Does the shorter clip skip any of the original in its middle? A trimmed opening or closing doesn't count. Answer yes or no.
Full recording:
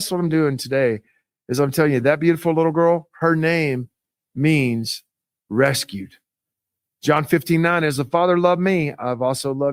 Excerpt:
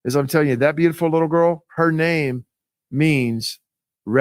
no